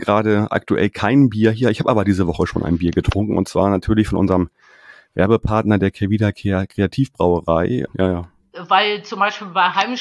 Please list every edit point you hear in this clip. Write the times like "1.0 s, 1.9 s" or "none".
7.9 s